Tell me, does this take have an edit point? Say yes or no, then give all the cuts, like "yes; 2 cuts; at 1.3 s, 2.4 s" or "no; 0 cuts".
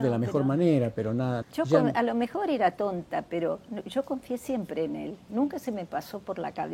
yes; 1 cut; at 1.4 s